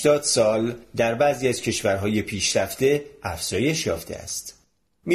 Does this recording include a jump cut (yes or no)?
no